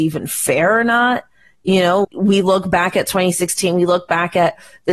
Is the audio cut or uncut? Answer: cut